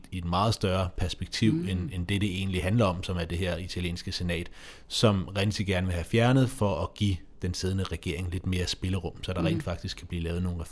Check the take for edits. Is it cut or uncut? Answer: uncut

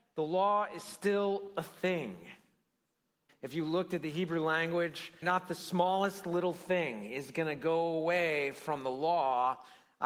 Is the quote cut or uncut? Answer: cut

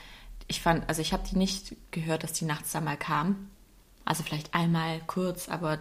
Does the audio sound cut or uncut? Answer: uncut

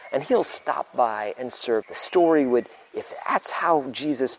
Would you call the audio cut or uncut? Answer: cut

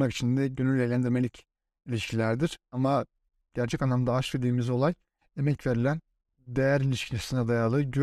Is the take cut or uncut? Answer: uncut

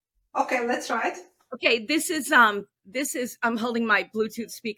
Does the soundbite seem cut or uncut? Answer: uncut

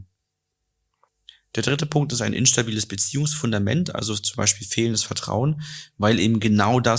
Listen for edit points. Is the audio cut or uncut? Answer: uncut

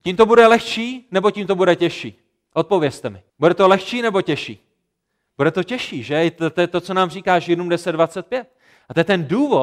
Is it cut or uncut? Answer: cut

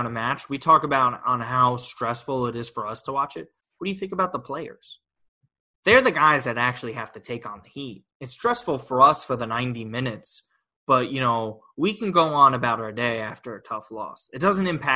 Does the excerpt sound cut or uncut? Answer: uncut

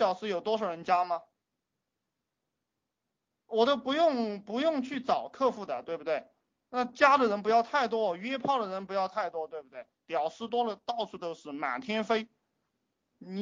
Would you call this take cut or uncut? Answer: uncut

